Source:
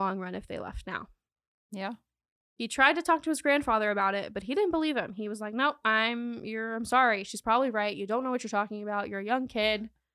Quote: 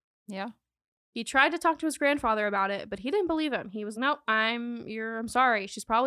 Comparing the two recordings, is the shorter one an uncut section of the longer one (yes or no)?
no